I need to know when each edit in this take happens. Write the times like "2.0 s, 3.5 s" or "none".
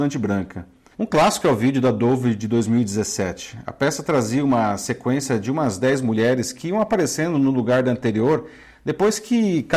0.9 s